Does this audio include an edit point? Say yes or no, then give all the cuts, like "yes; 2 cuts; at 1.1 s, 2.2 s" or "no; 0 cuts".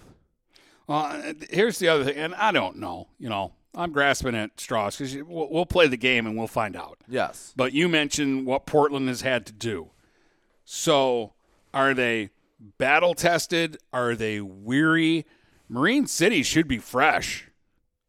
no; 0 cuts